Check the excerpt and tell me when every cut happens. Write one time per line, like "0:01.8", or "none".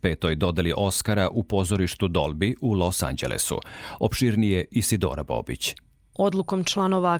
none